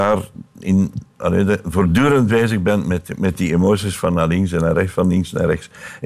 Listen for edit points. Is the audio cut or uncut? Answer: uncut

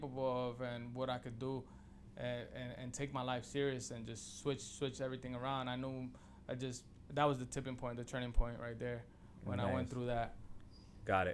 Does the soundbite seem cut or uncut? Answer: uncut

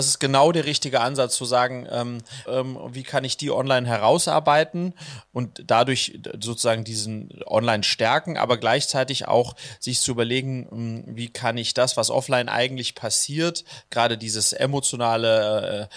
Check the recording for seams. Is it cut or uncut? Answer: cut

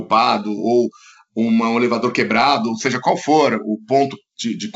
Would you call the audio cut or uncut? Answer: uncut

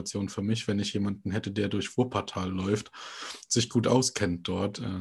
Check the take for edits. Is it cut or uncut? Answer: uncut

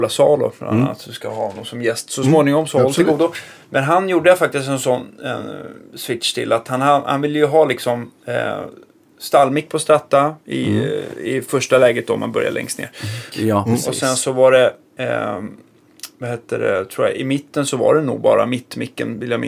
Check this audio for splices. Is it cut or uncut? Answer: cut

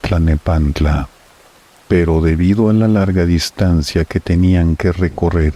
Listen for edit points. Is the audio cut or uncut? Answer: uncut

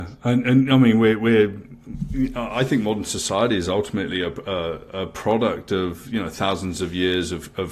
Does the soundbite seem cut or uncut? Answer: uncut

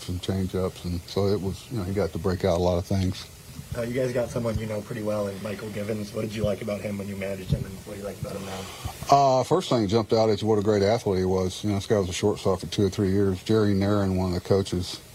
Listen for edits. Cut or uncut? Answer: uncut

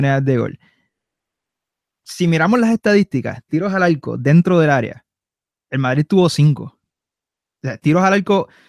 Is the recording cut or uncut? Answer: uncut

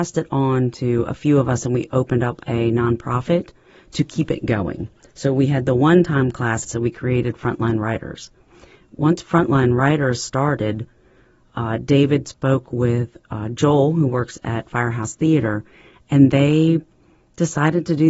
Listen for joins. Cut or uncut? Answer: cut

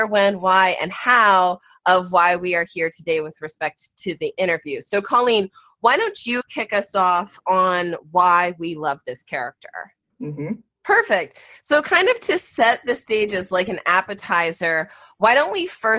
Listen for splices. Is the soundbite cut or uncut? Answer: cut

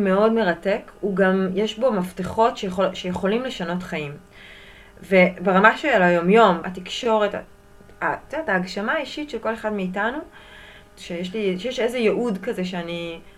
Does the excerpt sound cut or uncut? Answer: cut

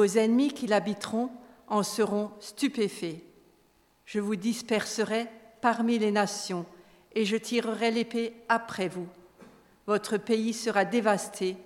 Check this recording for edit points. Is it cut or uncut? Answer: uncut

